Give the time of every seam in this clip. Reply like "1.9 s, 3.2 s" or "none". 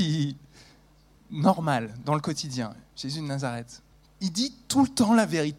4.1 s